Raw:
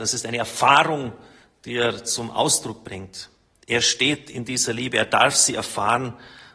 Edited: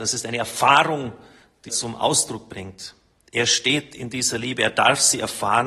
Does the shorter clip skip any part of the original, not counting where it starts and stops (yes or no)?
yes